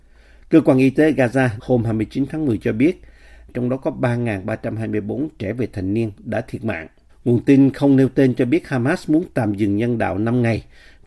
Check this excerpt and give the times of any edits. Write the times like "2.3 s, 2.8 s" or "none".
1.6 s, 3.5 s, 7.1 s